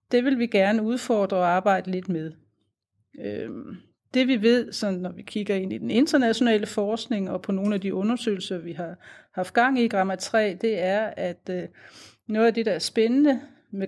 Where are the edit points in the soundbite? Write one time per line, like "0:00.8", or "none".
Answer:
none